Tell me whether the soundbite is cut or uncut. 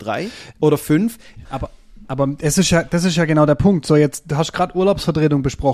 cut